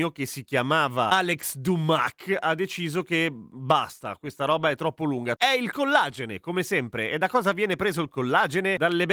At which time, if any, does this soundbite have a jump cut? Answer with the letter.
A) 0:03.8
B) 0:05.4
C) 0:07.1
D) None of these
B